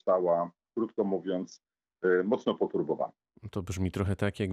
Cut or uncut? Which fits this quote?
uncut